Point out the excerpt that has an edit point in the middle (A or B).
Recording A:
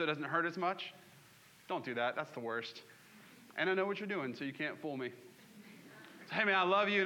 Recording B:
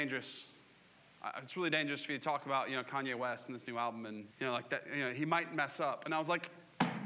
B